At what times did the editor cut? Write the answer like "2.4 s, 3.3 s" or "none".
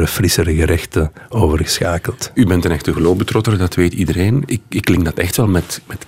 4.5 s